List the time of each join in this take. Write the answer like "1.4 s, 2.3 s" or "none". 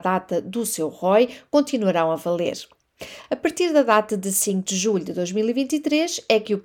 none